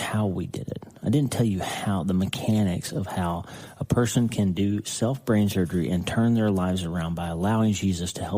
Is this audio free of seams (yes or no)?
yes